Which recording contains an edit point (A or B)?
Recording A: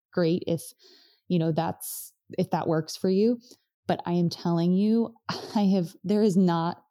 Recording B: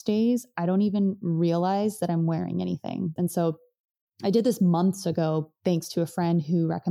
B